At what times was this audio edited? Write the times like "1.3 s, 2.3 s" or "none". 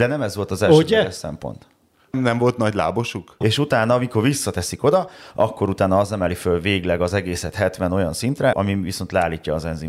2.1 s, 3.4 s, 8.5 s